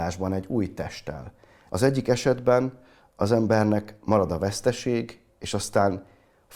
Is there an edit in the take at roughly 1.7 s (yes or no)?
yes